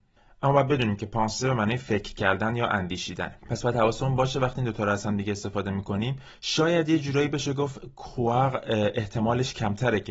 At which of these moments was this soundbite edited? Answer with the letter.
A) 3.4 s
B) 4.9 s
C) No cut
A